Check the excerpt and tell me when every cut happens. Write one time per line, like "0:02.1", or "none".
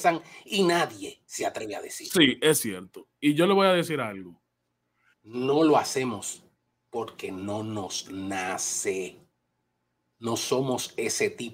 0:05.1